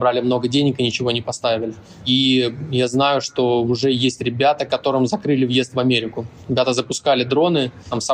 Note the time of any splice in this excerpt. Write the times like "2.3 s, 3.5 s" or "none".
none